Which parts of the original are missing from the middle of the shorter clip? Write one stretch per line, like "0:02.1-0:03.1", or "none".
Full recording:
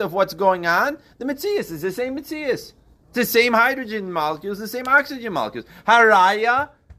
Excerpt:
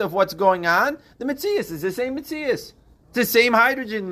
none